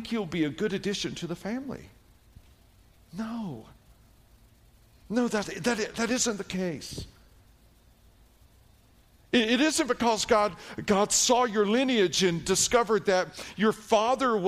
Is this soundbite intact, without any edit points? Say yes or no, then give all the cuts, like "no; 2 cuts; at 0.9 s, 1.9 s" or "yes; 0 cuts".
yes; 0 cuts